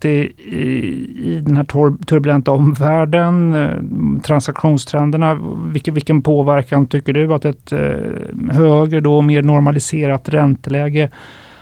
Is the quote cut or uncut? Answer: uncut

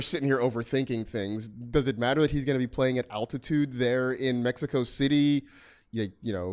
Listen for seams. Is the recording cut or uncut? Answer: uncut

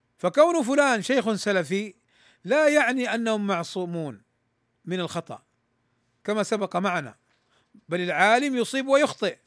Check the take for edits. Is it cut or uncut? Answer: uncut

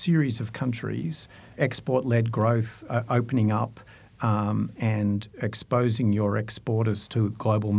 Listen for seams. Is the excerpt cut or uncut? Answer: cut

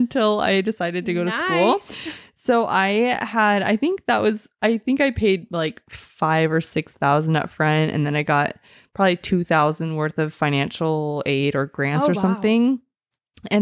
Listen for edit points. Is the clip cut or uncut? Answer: uncut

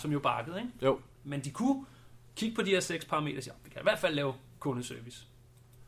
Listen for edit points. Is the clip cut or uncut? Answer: cut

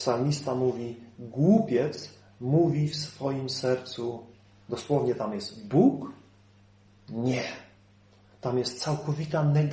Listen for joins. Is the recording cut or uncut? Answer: uncut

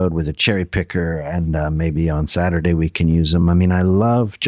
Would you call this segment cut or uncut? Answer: uncut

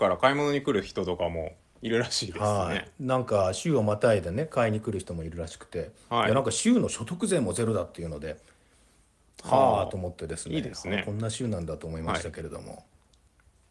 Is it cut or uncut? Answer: uncut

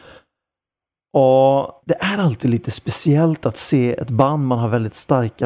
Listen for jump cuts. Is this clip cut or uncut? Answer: uncut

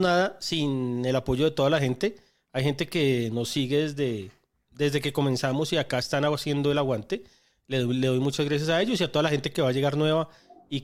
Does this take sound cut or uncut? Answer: uncut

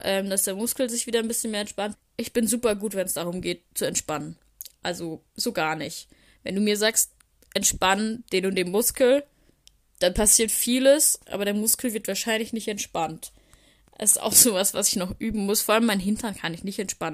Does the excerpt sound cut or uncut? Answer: cut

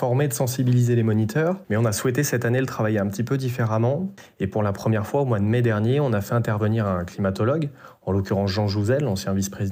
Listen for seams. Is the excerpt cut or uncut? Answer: cut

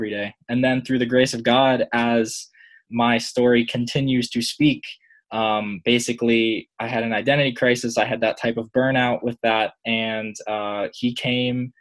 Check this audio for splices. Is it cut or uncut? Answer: uncut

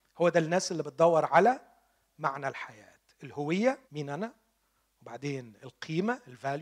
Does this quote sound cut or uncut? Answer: cut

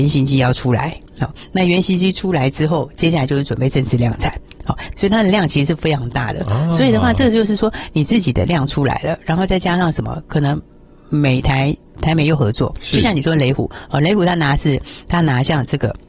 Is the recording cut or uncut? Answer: cut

